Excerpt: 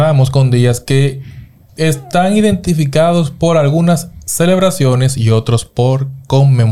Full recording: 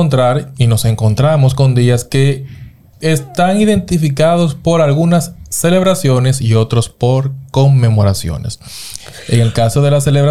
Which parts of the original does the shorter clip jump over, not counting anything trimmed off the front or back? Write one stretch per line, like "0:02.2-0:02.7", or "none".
none